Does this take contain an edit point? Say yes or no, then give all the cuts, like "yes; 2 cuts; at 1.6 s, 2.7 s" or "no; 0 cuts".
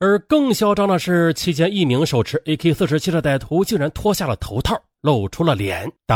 no; 0 cuts